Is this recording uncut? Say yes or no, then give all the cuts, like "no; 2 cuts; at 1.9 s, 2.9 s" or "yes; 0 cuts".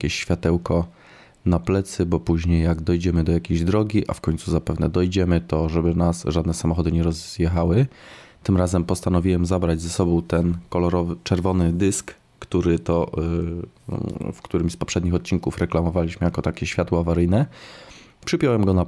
yes; 0 cuts